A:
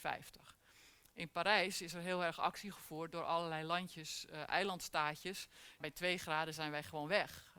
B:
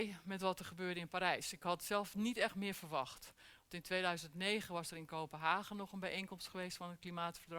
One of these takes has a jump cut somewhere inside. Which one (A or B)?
A